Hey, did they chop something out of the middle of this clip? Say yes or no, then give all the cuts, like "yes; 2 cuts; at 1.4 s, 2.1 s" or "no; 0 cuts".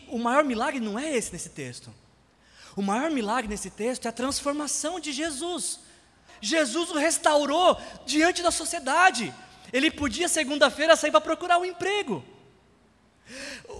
yes; 1 cut; at 6.3 s